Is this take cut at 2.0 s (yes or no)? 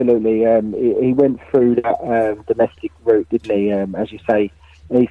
no